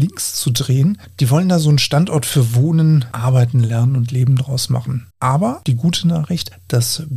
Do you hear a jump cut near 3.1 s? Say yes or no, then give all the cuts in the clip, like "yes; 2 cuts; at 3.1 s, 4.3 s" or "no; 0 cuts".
no; 1 cut; at 5.1 s